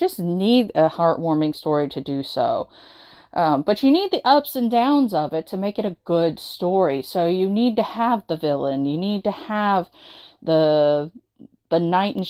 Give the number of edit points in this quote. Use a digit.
0